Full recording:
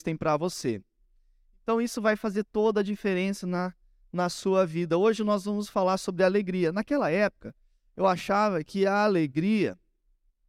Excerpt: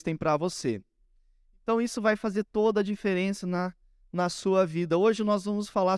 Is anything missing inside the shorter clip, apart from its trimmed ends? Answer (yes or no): no